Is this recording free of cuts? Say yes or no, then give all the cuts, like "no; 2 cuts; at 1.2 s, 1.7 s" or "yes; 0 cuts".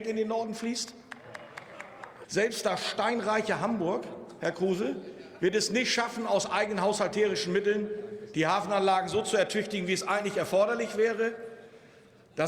no; 1 cut; at 2.2 s